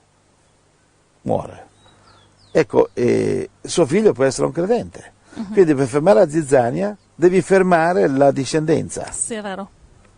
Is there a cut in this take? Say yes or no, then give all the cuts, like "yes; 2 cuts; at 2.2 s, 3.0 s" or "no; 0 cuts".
yes; 2 cuts; at 3.5 s, 7.0 s